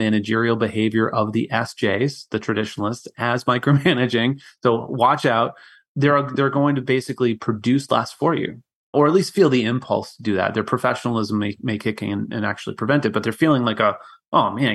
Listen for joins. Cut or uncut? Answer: uncut